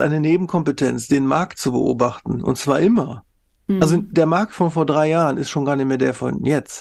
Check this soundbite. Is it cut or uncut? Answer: uncut